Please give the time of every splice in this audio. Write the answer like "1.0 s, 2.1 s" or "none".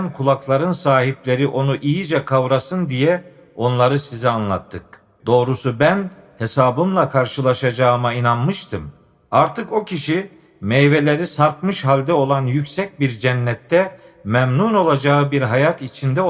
5.2 s